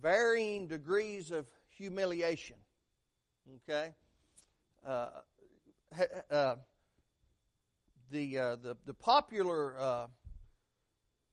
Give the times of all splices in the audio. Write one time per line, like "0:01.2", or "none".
none